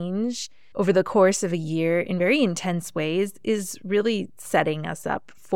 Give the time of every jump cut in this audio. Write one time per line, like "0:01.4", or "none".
none